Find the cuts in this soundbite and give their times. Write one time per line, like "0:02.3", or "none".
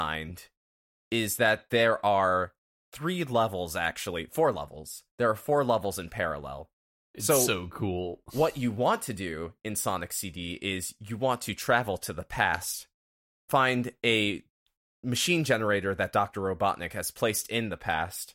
0:07.0